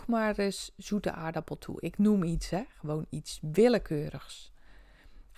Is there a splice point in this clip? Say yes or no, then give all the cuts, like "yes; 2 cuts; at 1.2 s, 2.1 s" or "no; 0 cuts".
no; 0 cuts